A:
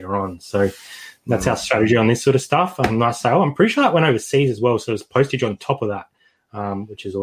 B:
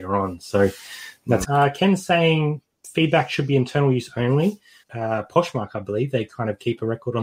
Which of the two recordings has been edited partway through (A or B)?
B